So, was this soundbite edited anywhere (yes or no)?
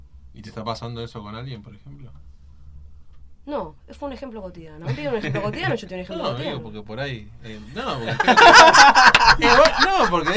no